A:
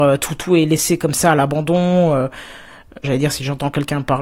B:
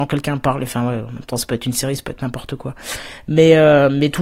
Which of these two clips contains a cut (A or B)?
A